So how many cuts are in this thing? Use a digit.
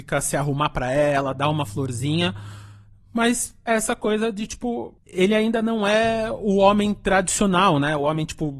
0